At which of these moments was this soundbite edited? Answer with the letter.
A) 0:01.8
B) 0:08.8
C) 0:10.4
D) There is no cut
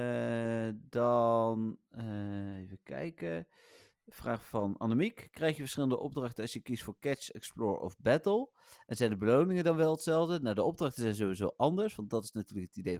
D